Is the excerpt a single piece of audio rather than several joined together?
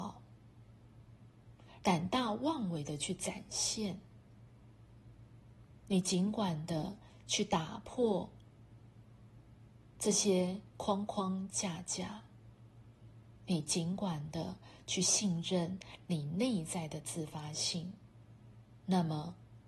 no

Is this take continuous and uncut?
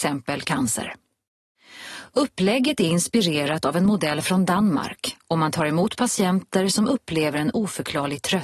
yes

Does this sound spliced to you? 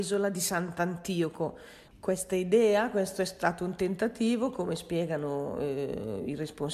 yes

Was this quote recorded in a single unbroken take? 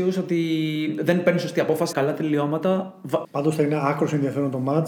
no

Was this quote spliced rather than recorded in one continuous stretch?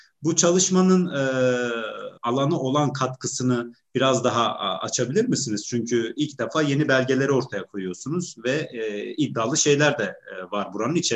yes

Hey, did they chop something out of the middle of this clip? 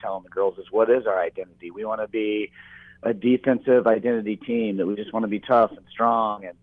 no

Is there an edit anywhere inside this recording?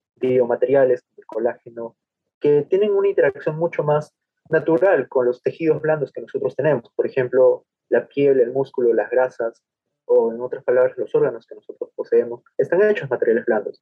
no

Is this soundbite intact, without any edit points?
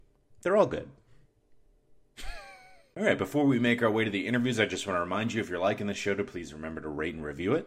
yes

